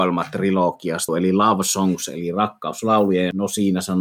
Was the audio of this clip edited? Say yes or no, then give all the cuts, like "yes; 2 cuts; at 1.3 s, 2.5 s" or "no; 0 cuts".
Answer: yes; 1 cut; at 1.1 s